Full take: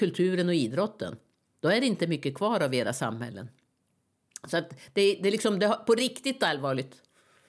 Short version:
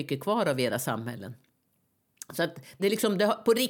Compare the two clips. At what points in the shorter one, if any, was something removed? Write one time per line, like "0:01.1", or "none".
0:02.8